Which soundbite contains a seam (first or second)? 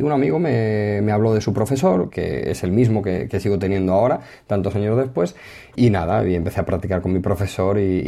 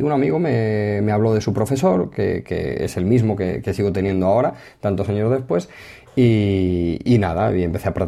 first